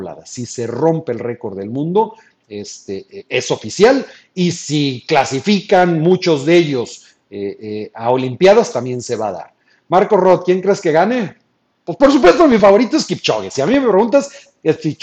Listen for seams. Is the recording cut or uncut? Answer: uncut